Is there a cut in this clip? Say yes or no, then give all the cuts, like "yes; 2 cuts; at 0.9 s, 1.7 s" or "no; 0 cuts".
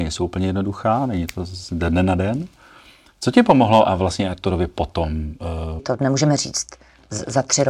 yes; 1 cut; at 5.8 s